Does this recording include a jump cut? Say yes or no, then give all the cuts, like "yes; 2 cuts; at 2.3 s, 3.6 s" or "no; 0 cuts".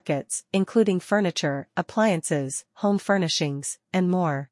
no; 0 cuts